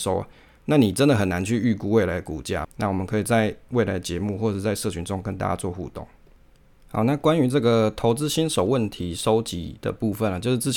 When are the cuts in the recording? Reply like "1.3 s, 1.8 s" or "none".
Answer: 2.6 s